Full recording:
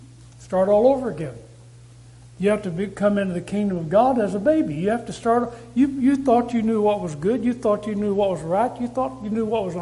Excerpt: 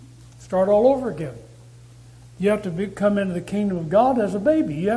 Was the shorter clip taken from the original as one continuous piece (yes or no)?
yes